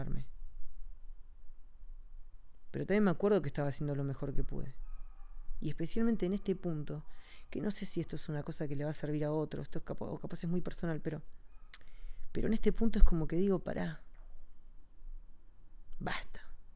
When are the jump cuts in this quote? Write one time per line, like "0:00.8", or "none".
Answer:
none